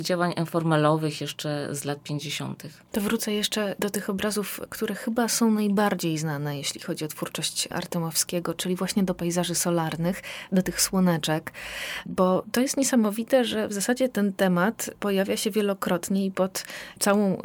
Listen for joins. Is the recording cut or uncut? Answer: uncut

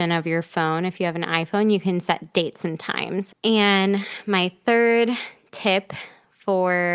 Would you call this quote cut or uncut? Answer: cut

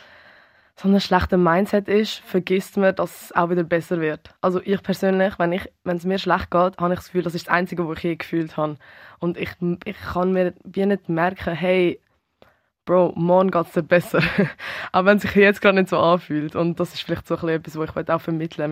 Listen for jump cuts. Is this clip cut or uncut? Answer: uncut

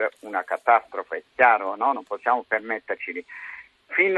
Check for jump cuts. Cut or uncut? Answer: uncut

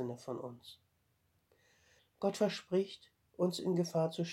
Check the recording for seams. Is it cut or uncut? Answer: cut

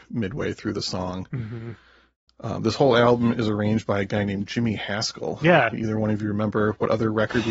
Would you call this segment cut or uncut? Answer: uncut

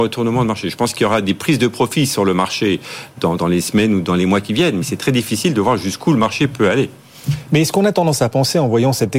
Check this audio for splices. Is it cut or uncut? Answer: uncut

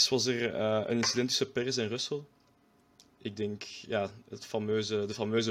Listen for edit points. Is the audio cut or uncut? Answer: uncut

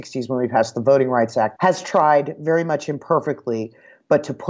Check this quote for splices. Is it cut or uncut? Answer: cut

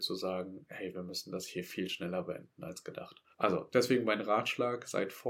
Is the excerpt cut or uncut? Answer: cut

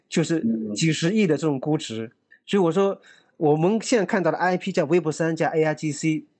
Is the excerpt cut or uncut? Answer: cut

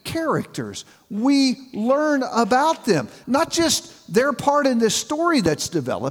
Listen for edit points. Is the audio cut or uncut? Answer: cut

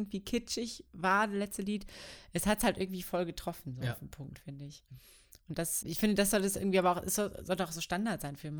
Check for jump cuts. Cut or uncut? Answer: cut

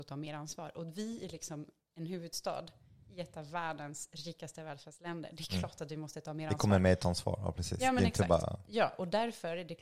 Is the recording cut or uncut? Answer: uncut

